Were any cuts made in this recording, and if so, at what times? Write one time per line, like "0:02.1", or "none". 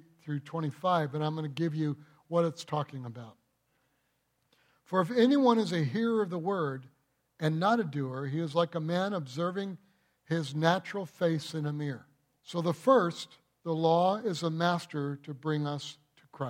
0:12.4